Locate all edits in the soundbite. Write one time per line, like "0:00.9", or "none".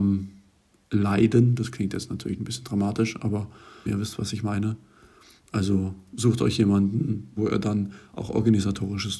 0:03.9
0:07.4